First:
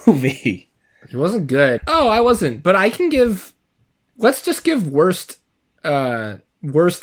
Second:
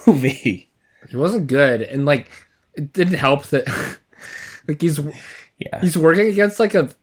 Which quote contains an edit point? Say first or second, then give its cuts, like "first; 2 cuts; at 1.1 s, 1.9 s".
first; 1 cut; at 1.8 s